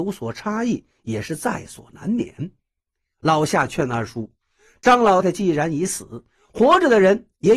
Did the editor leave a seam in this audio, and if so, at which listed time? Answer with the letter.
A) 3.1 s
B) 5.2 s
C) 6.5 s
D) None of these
B